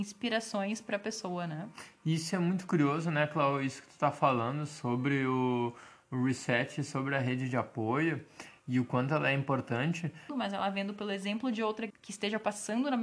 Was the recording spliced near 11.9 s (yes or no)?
yes